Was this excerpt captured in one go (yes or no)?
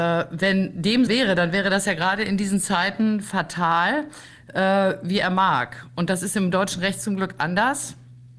no